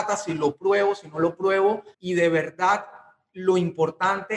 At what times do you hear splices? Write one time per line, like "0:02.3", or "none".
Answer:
0:01.9

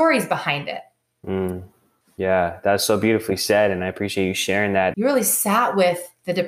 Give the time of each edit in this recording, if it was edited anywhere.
0:02.0
0:04.9

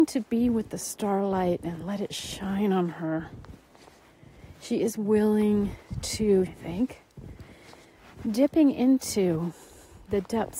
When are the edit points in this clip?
0:06.5

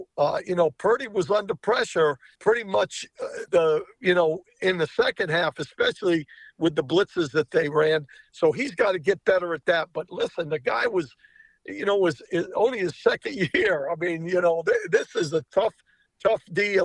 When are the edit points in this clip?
0:02.4
0:03.5

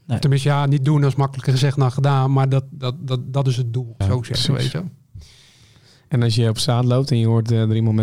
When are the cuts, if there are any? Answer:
0:04.0

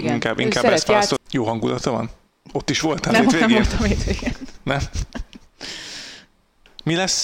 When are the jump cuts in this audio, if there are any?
0:01.2

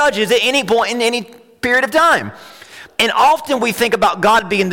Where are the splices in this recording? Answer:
0:02.9

